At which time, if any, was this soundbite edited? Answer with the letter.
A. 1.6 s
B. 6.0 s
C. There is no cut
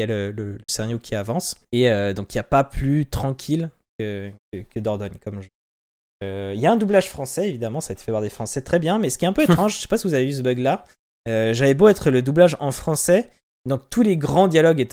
A